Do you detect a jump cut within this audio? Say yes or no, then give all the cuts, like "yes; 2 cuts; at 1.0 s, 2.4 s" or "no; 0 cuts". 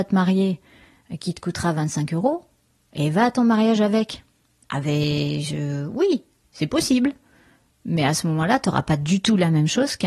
no; 0 cuts